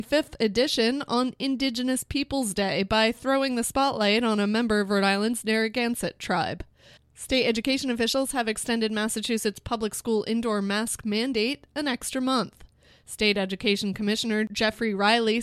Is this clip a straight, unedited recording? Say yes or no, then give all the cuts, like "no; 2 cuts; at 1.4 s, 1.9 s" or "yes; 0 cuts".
no; 1 cut; at 7.0 s